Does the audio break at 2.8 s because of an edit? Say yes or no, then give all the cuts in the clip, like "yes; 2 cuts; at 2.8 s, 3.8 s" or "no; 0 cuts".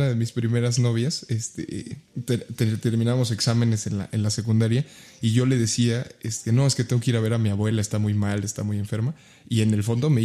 no; 0 cuts